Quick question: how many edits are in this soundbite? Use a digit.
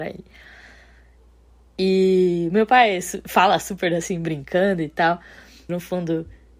1